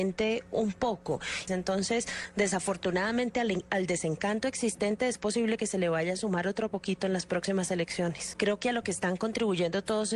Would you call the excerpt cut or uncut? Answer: cut